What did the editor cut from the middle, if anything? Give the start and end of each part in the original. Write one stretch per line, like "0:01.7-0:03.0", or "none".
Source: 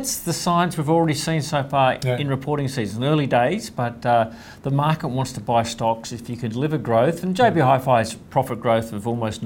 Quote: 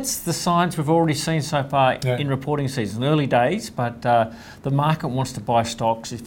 none